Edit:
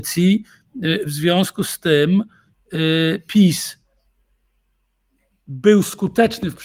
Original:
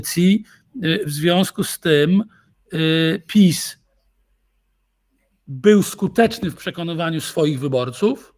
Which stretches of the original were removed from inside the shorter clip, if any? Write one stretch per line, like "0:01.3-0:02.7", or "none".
none